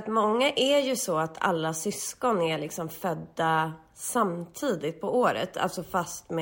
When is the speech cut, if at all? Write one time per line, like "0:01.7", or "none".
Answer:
none

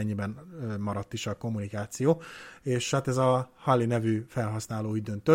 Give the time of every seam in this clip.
none

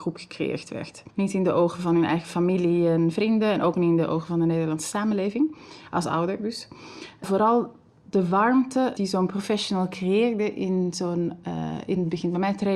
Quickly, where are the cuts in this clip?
0:01.1

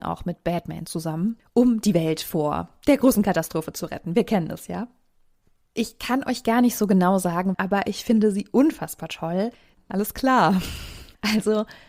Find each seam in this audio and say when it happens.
0:07.5
0:09.7

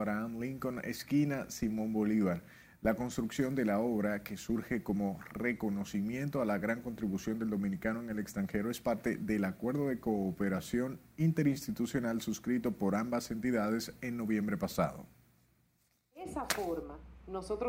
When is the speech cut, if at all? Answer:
none

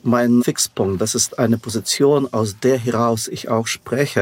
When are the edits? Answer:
none

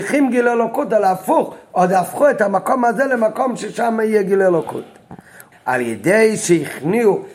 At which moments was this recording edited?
0:05.5

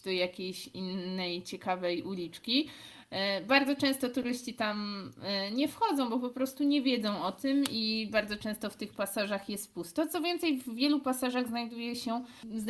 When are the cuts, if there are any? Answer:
none

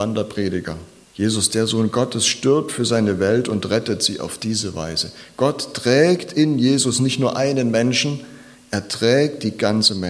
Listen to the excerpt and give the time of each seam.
0:01.0

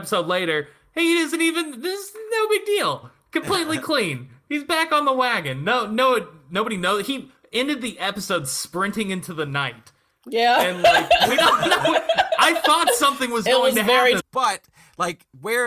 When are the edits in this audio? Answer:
0:14.2

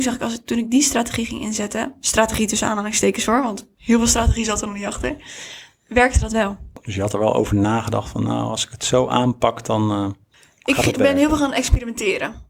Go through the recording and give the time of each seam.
none

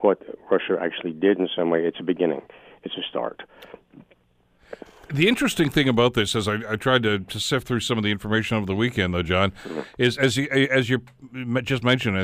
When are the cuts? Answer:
none

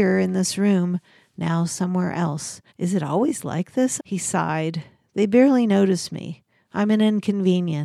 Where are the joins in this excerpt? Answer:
0:02.7
0:04.0

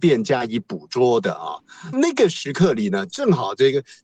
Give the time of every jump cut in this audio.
0:01.9

